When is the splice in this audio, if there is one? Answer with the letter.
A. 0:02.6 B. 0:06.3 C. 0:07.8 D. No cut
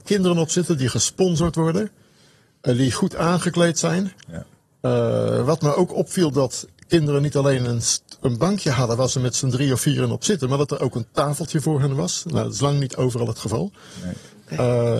D